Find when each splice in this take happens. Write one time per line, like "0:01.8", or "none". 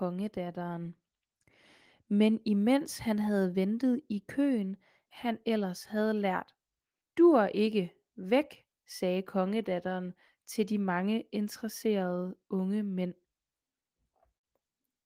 0:05.1
0:07.0